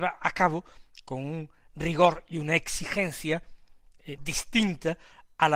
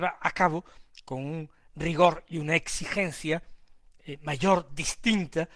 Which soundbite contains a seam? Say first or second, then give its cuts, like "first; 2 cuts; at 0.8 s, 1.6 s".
first; 1 cut; at 4.2 s